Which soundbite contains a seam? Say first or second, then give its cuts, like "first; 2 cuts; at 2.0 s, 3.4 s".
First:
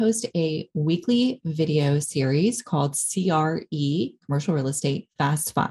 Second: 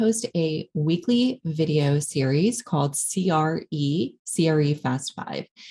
second; 1 cut; at 4.2 s